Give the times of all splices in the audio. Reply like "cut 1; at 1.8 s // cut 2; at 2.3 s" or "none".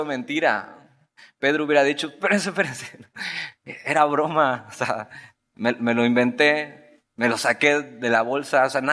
cut 1; at 7.1 s